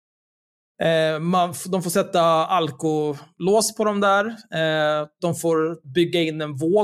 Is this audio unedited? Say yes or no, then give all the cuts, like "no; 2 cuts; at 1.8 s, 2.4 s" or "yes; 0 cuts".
yes; 0 cuts